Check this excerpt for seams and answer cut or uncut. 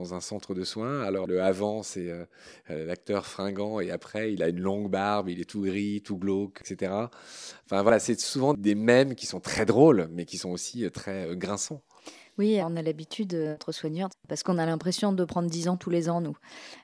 cut